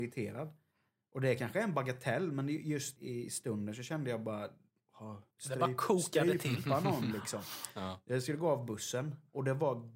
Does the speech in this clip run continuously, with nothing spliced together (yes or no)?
no